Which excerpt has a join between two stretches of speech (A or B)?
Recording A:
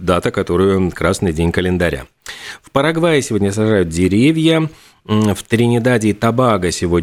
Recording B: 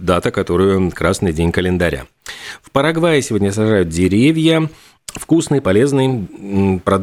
B